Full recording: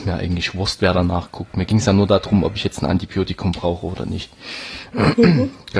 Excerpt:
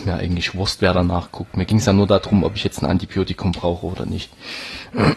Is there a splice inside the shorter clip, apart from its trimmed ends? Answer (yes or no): no